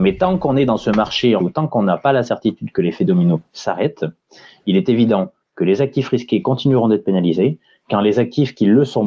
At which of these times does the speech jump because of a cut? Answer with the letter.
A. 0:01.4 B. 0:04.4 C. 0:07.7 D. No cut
A